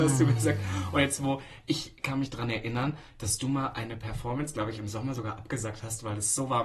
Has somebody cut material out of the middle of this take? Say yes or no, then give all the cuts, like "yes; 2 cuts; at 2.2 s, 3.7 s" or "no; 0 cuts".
no; 0 cuts